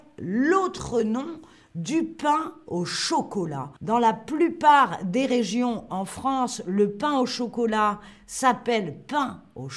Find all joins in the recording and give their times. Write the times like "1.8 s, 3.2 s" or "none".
3.8 s